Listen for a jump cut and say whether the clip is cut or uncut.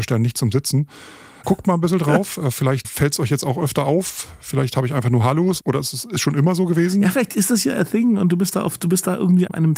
cut